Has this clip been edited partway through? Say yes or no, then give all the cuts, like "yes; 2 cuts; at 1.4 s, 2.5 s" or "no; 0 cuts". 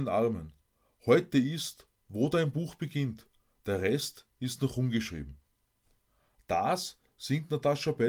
no; 0 cuts